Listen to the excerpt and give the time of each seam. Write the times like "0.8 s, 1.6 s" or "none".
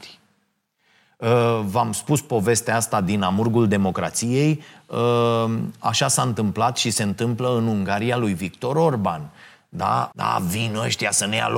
10.1 s